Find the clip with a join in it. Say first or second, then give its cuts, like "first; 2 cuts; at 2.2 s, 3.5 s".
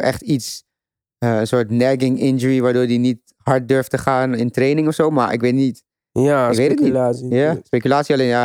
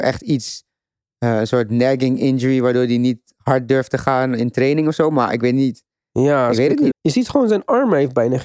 second; 1 cut; at 6.9 s